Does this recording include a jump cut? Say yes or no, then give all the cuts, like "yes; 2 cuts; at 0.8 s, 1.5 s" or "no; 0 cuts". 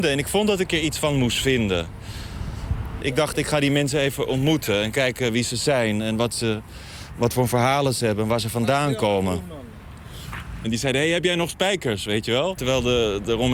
yes; 3 cuts; at 3.0 s, 10.6 s, 12.6 s